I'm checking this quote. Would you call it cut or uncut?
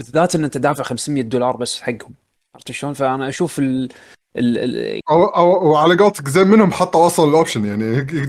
cut